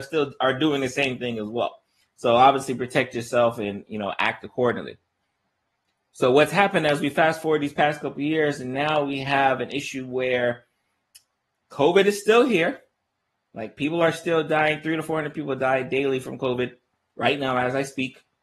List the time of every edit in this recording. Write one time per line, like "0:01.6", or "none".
none